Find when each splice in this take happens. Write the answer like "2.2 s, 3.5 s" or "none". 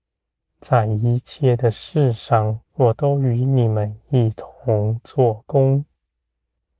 2.7 s